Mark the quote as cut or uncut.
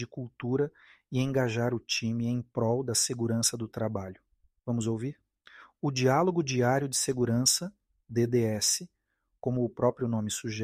uncut